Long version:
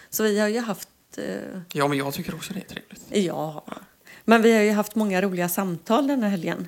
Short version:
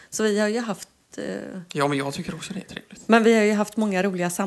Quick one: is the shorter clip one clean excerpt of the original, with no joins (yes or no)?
no